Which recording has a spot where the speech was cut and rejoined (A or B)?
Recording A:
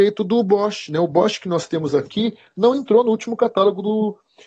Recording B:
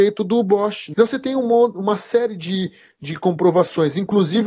B